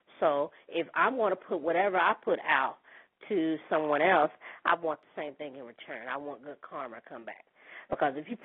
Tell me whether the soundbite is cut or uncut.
uncut